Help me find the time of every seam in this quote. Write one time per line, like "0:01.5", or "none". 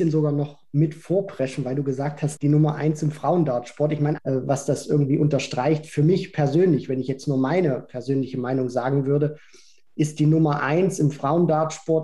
0:02.4
0:04.2